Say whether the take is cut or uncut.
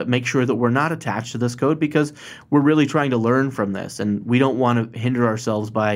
uncut